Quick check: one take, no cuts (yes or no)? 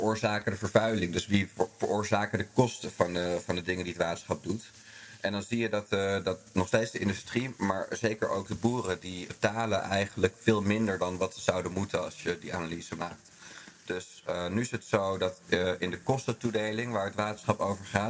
no